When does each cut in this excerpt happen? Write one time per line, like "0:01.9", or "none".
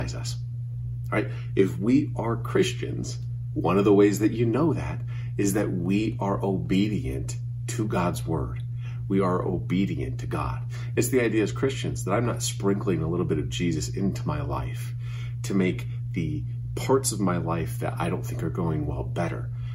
0:11.0